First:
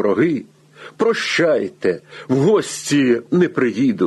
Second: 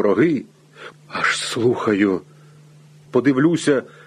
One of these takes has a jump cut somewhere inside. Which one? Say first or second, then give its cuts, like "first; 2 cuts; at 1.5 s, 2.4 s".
second; 2 cuts; at 0.9 s, 3.1 s